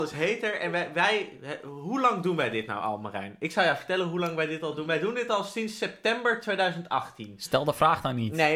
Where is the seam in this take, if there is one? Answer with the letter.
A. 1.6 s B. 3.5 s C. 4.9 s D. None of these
D